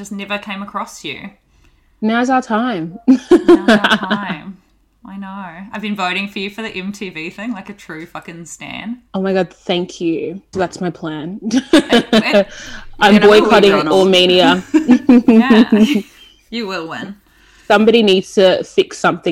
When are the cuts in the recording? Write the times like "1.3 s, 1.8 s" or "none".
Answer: 9.1 s, 10.5 s